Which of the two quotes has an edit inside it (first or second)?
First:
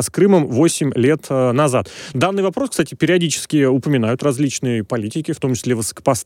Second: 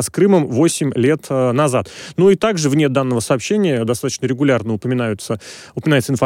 first